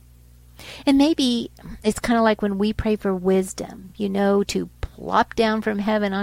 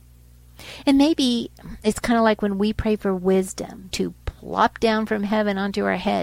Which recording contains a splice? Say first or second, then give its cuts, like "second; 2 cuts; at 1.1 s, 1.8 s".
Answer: second; 1 cut; at 3.9 s